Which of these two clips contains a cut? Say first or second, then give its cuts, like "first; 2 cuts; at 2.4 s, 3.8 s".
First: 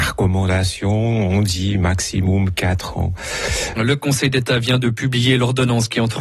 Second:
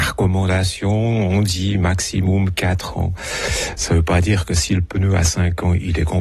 first; 1 cut; at 3.8 s